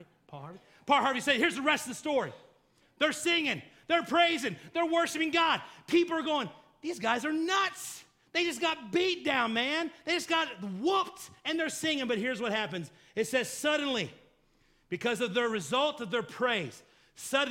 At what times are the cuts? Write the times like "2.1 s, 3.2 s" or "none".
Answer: none